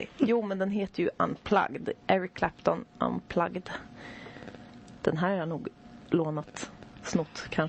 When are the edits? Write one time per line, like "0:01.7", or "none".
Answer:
none